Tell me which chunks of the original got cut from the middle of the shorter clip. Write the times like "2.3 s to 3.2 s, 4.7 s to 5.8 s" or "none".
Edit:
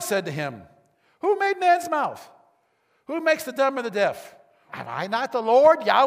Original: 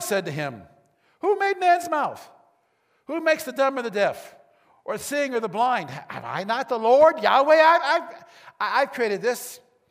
4.7 s to 6.1 s